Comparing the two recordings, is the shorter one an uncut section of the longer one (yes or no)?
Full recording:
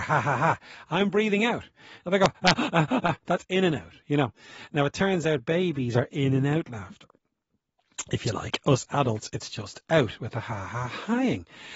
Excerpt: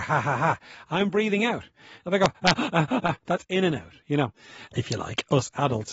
no